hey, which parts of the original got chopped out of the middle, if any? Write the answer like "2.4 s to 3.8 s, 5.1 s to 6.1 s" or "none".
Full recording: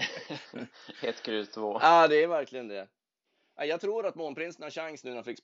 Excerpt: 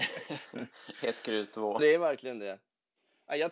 1.8 s to 2.1 s